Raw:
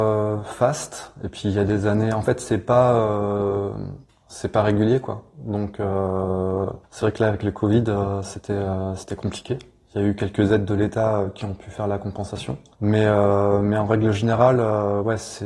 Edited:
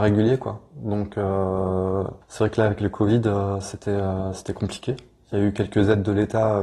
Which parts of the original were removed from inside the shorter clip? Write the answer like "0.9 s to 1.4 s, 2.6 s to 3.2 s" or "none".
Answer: none